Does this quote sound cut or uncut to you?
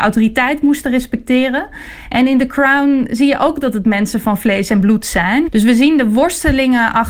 cut